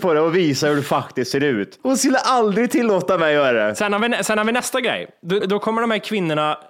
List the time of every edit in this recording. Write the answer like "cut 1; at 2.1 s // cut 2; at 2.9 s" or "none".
cut 1; at 5.4 s